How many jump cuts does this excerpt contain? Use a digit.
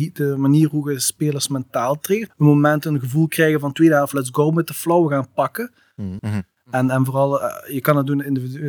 2